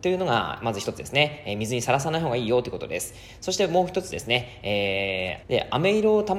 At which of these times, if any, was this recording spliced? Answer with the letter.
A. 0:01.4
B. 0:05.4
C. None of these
B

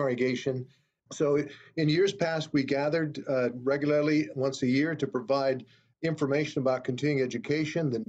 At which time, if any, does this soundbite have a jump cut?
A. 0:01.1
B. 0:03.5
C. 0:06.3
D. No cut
A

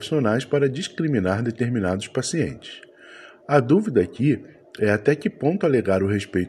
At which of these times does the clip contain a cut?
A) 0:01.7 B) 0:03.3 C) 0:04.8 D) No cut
D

